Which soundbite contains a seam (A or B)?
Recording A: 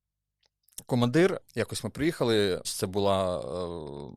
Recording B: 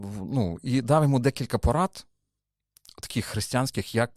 A